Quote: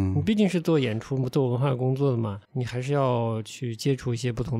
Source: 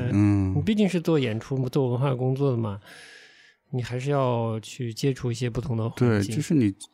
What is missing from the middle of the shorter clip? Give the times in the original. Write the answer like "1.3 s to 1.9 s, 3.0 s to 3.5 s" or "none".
2.8 s to 3.6 s